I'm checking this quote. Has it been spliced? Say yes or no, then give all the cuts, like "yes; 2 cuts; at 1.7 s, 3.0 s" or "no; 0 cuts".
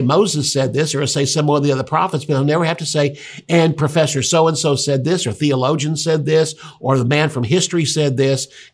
no; 0 cuts